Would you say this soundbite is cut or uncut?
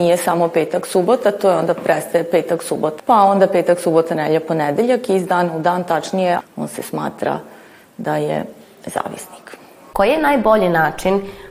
cut